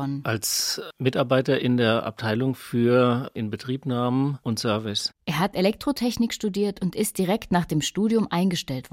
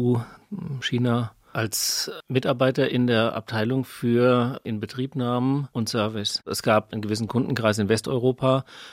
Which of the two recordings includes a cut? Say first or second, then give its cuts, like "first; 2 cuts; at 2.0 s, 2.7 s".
second; 2 cuts; at 1.5 s, 6.4 s